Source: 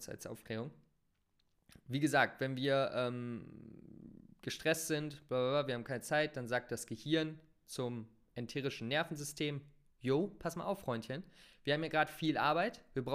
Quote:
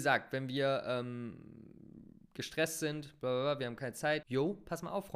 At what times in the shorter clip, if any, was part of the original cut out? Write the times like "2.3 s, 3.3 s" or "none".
4.2 s